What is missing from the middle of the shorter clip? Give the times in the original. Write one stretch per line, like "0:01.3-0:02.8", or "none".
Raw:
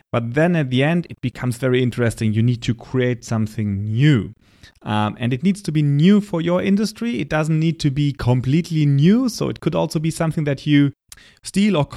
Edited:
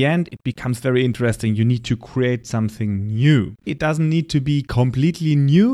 0:04.4-0:07.2